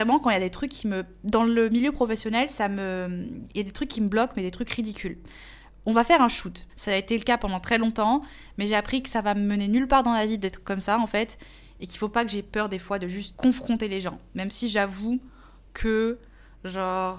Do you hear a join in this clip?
yes; 2 cuts; at 6.7 s, 13.3 s

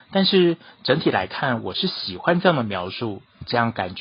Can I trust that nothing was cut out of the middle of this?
yes; 0 cuts

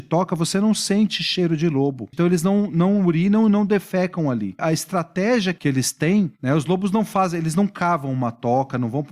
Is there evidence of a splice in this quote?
yes; 2 cuts; at 2.1 s, 4.6 s

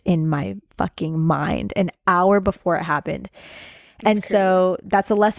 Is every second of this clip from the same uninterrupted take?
yes; 0 cuts

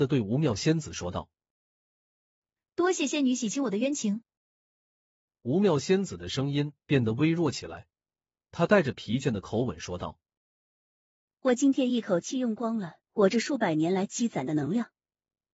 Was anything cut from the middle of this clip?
no; 0 cuts

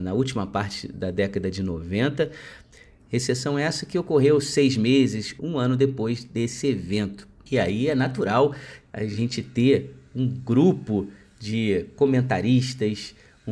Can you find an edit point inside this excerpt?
yes; 2 cuts; at 3.0 s, 5.4 s

